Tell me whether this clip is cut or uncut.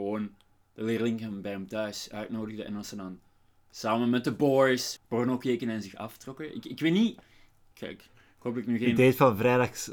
cut